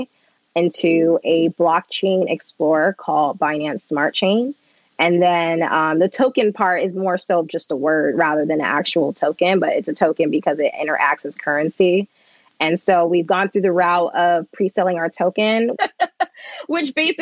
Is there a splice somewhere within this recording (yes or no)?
yes